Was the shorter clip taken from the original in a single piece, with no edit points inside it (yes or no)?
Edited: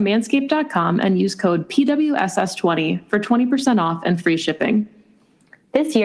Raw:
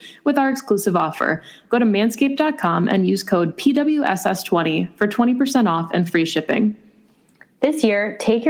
yes